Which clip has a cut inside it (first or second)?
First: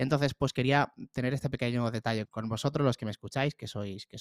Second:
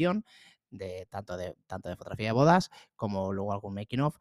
first